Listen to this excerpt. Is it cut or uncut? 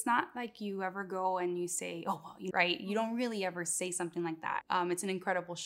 cut